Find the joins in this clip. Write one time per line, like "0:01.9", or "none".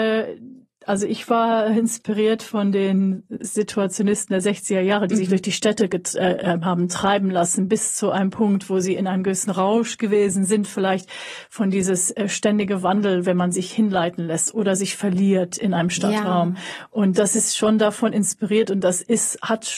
none